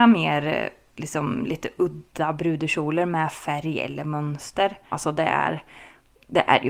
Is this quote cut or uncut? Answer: cut